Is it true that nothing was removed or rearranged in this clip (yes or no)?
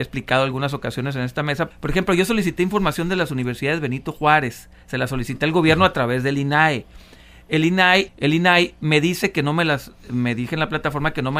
no